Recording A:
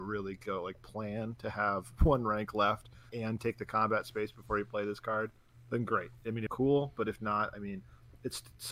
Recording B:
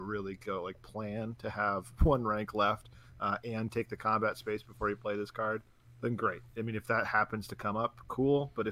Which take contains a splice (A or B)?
A